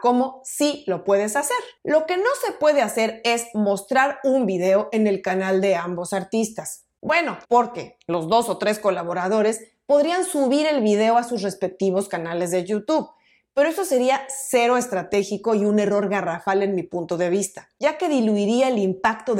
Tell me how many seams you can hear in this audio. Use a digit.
1